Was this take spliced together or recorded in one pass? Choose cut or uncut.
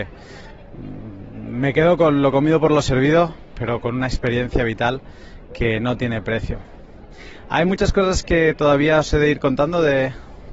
uncut